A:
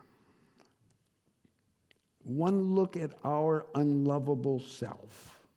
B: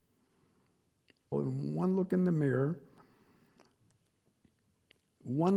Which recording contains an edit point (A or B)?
B